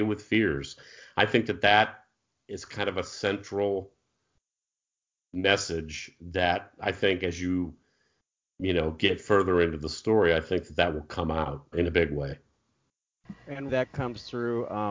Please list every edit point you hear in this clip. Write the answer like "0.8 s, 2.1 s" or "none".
11.7 s, 13.7 s